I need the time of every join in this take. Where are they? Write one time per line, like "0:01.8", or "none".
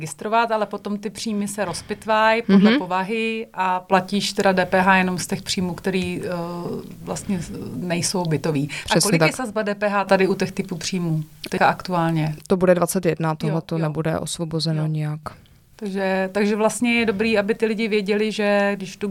none